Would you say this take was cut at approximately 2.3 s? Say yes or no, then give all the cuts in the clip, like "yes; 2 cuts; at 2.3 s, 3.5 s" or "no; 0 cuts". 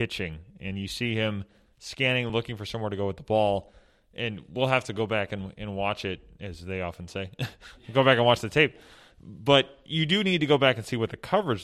no; 0 cuts